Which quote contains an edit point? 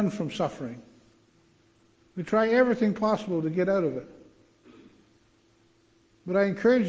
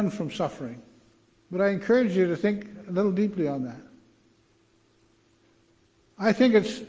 second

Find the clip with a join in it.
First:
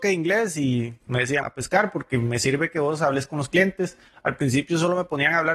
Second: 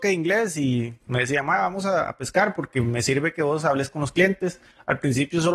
first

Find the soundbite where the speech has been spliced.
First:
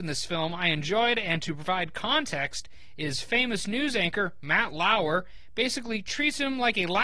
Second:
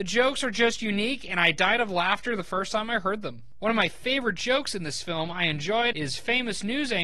second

